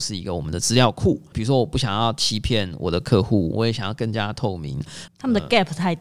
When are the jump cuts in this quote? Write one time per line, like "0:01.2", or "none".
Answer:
0:01.3
0:03.5
0:05.1